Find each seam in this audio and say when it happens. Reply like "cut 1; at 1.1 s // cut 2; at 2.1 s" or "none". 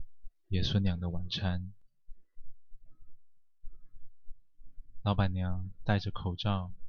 cut 1; at 5.0 s